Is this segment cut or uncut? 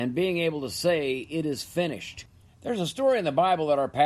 uncut